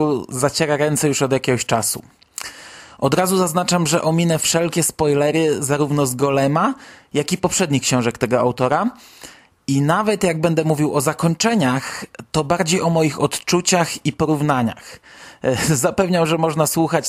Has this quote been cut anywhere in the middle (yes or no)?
no